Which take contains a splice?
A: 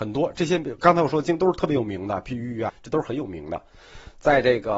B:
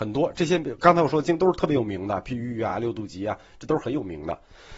A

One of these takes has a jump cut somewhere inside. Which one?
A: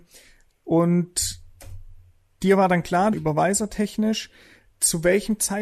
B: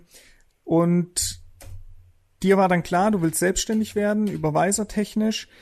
A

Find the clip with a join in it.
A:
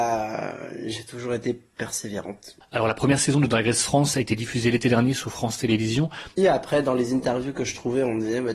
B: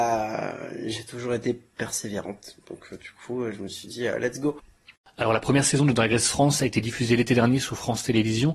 A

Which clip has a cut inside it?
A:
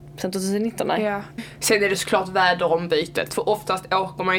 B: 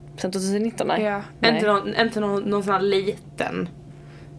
A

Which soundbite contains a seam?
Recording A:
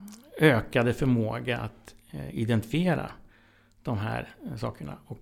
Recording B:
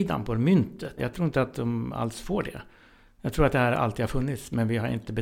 B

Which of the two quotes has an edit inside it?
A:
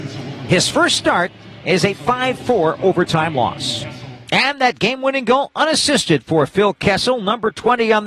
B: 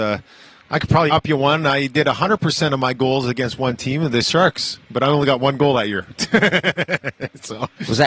B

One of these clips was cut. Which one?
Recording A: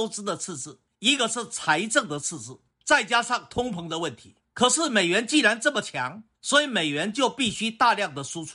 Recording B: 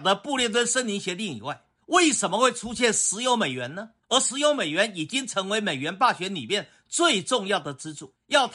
A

